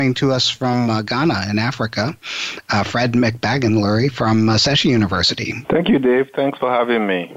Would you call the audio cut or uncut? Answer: cut